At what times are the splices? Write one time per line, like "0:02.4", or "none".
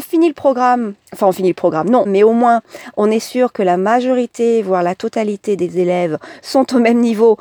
0:01.0
0:02.0